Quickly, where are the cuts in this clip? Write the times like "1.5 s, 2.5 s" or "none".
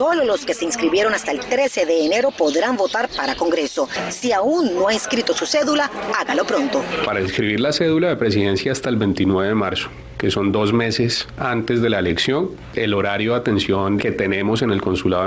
14.0 s

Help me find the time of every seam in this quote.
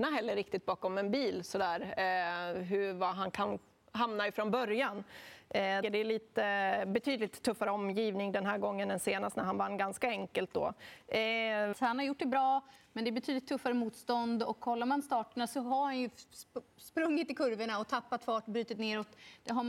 5.8 s, 11.7 s

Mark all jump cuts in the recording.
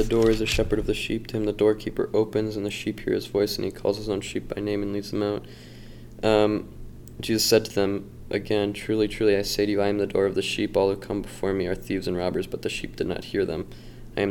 none

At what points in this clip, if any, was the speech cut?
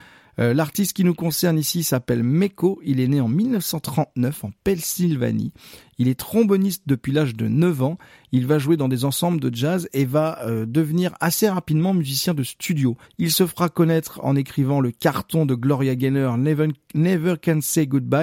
13.0 s

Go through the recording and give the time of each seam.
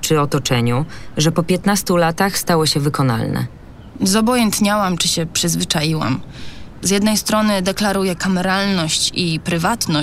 3.9 s, 6.8 s

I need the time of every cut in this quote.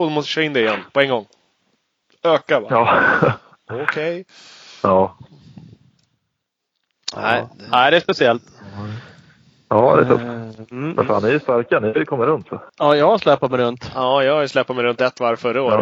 12.7 s

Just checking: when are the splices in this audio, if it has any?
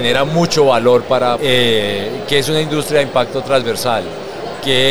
1.4 s

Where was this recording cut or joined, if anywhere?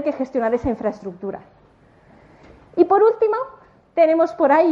none

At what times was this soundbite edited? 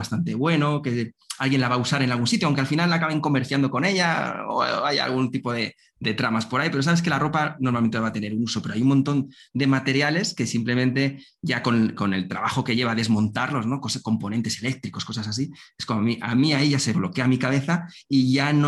none

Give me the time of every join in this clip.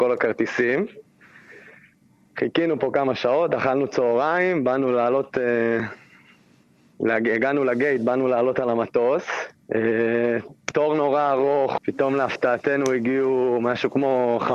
9.6 s, 11.8 s

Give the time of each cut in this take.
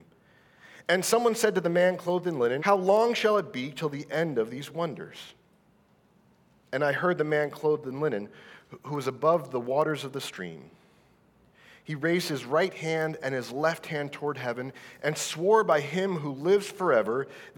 2.6 s

